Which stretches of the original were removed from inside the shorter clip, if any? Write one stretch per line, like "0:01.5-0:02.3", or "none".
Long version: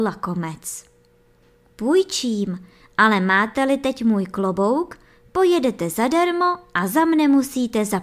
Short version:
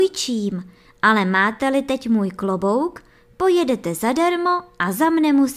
none